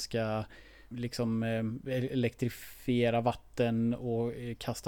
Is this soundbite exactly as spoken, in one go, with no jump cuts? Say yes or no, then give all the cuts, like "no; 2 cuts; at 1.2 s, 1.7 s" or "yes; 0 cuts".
no; 1 cut; at 0.9 s